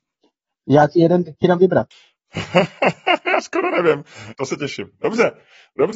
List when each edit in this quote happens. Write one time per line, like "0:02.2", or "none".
0:01.9
0:04.3